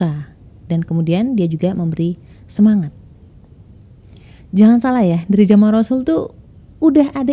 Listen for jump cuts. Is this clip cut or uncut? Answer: uncut